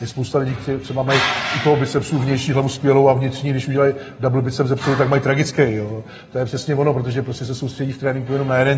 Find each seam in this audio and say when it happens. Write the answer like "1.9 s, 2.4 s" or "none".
none